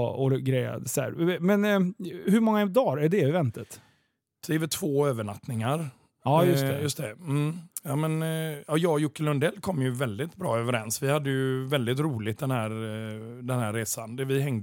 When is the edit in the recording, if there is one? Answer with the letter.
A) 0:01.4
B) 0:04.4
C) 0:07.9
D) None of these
B